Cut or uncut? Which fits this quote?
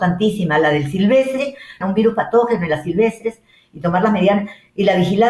cut